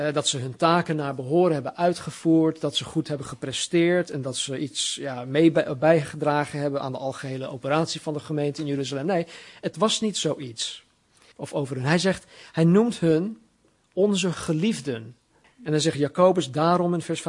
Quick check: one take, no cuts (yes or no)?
no